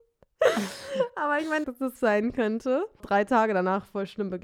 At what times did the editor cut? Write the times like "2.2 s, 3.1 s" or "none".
1.6 s, 3.0 s